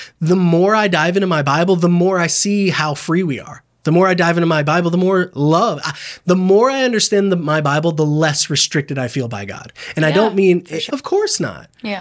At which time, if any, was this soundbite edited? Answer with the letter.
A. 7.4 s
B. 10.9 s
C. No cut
B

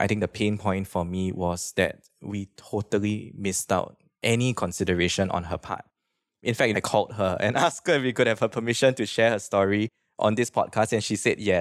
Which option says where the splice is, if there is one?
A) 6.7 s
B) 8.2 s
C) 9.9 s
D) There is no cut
A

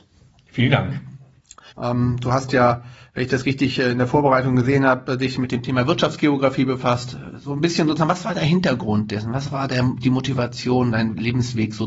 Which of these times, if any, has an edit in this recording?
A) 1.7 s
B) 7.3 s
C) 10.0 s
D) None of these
A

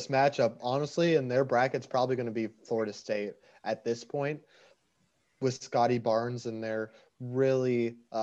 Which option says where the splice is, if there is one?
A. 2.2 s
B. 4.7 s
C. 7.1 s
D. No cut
D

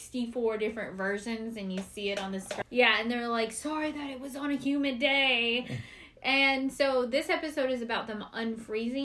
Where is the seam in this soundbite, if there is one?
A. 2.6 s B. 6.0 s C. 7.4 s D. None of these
A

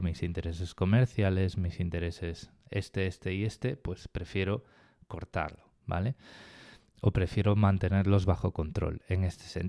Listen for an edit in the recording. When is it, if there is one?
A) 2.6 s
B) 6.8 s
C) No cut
C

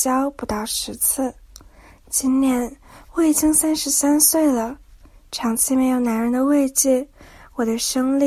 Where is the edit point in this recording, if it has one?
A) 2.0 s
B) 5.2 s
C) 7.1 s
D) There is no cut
D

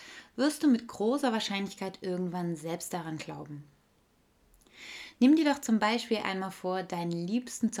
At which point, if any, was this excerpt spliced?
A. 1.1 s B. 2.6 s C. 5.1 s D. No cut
C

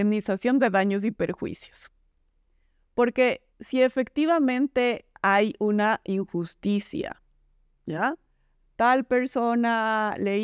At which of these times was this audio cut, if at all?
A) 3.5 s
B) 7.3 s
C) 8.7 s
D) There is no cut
A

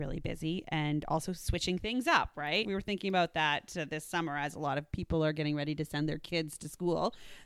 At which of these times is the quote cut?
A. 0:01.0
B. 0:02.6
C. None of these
B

